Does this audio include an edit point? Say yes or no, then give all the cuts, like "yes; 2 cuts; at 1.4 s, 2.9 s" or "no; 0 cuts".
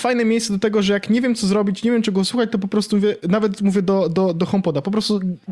no; 0 cuts